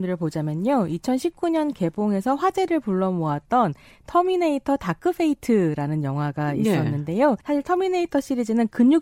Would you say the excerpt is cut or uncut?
cut